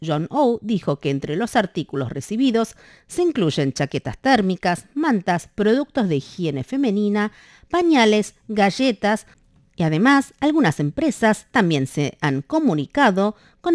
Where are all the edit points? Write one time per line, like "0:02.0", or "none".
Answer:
none